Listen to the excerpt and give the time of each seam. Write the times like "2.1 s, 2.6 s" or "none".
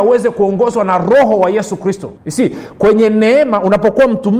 2.2 s